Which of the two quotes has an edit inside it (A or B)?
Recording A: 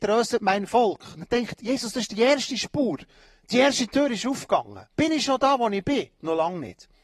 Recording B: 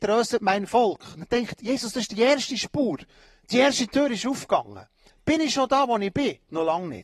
A